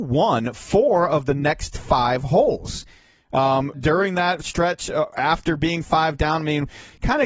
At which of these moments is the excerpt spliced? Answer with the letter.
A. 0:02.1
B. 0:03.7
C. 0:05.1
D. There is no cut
B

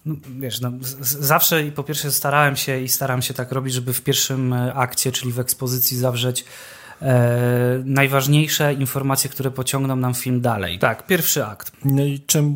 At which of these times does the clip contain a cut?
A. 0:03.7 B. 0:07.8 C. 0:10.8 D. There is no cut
C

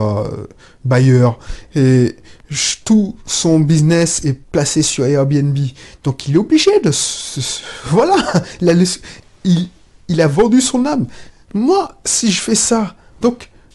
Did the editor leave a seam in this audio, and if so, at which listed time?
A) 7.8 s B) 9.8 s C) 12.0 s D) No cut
D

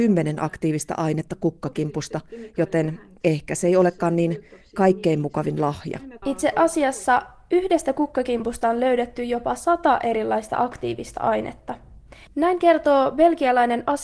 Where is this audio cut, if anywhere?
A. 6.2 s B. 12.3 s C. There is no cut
A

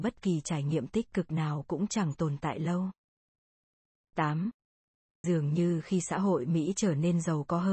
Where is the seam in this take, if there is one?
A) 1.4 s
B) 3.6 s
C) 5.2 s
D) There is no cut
C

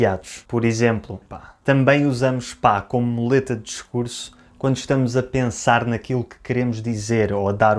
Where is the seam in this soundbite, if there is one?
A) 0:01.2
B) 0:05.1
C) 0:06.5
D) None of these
A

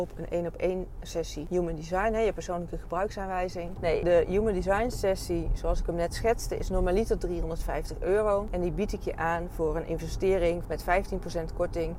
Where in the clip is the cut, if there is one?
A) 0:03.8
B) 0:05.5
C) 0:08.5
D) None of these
A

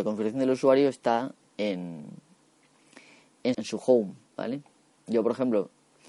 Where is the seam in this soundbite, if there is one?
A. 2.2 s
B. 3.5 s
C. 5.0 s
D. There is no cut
B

